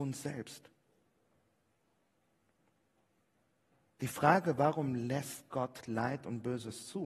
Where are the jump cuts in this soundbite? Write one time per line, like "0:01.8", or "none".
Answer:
none